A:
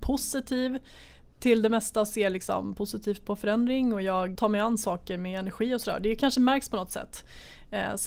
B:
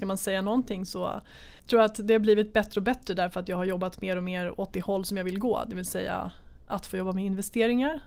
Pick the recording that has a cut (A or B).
A